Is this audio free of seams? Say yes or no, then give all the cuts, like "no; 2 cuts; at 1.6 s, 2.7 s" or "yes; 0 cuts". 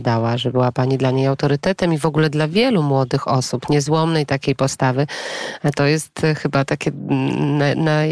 yes; 0 cuts